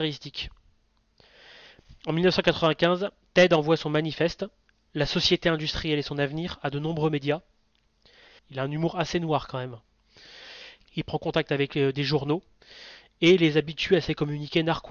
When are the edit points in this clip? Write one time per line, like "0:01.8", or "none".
0:08.4
0:10.8